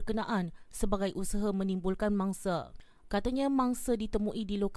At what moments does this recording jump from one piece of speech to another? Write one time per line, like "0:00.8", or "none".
0:03.1